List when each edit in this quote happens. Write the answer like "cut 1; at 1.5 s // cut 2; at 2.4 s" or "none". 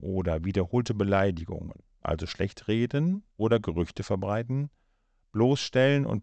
cut 1; at 2.0 s // cut 2; at 3.3 s